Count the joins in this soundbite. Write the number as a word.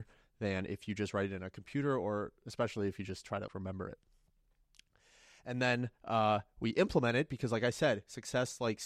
one